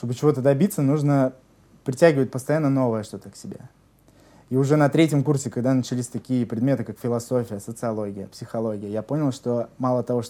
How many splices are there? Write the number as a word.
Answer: zero